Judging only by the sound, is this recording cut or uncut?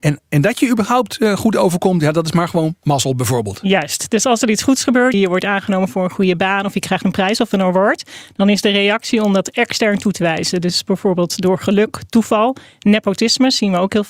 cut